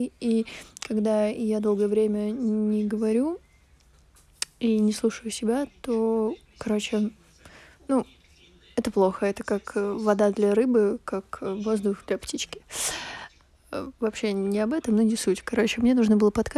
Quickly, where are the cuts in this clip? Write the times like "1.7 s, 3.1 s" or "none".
none

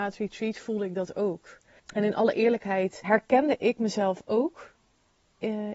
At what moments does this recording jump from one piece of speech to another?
1.8 s, 3.0 s

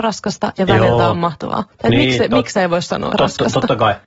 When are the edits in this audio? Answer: 3.1 s

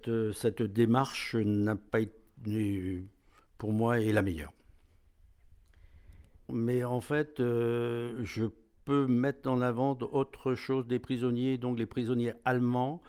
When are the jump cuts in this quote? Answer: 6.5 s

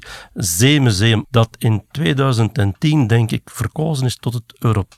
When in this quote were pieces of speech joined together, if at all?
1.2 s

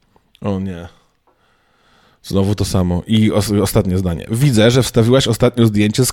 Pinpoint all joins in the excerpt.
none

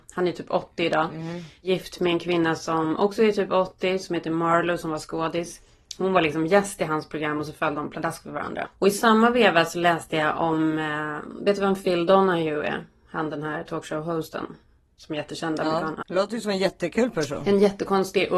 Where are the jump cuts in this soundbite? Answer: 8.6 s, 16.0 s

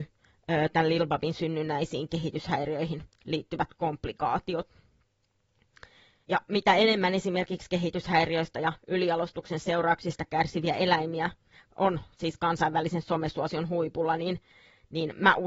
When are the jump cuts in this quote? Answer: 6.2 s

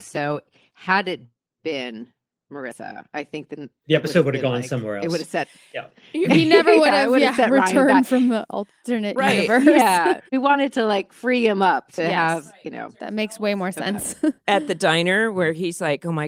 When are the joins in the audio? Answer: none

